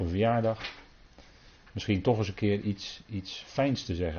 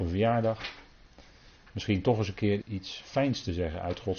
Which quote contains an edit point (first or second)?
second